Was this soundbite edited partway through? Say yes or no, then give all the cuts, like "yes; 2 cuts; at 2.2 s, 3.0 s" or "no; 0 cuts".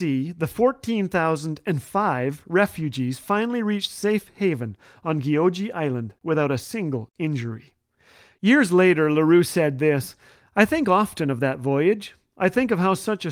yes; 1 cut; at 6.2 s